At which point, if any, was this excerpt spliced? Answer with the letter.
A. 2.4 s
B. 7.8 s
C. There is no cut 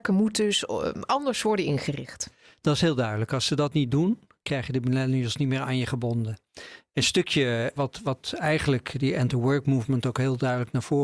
B